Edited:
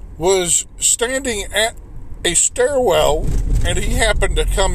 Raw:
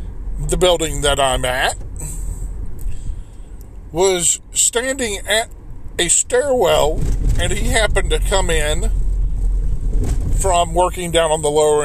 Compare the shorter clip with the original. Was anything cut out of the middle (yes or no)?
no